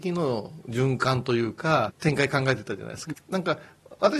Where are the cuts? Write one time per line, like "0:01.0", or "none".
0:01.9
0:03.1